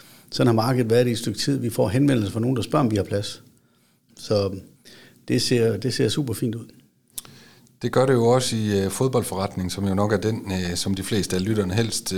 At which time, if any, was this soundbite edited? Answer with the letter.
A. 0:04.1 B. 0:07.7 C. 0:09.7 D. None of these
A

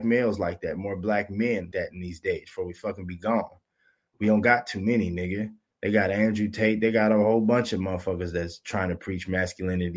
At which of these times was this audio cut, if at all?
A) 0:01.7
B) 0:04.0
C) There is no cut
A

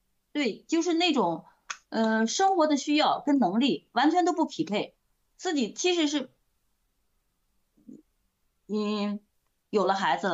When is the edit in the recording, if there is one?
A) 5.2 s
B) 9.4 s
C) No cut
C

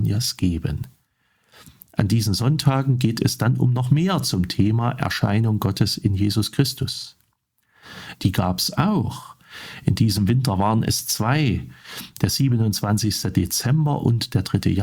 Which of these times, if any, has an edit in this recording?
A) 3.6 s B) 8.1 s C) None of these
B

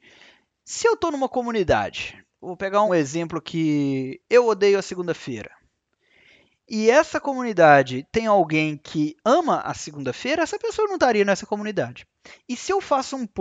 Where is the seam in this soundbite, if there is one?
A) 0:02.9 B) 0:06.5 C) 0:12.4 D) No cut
A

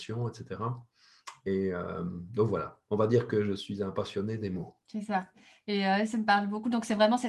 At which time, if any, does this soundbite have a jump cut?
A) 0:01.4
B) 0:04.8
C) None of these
B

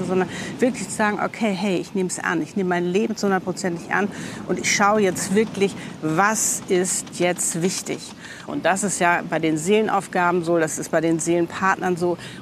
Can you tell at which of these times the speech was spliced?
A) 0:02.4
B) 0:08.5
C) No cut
B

